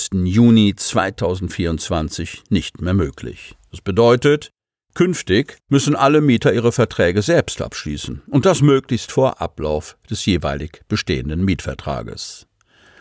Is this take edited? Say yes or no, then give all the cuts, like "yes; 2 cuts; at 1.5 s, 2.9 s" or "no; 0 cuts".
no; 0 cuts